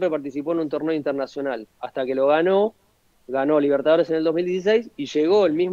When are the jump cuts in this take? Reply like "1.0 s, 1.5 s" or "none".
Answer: none